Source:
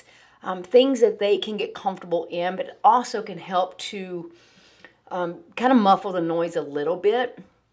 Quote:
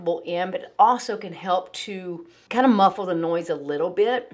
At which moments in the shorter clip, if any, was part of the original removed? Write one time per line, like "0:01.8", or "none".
0:02.5